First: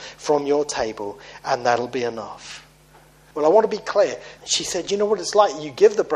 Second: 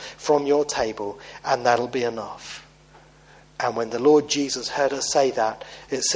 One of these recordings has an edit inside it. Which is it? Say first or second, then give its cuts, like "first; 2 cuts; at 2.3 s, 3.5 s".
first; 2 cuts; at 3.3 s, 4.4 s